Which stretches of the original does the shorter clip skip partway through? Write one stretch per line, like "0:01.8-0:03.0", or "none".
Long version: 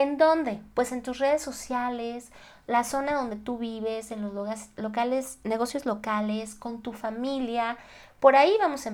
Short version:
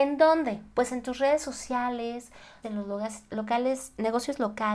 0:02.6-0:04.1